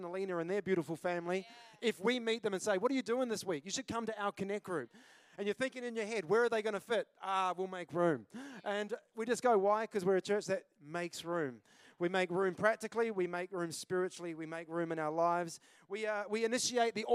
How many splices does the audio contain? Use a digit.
0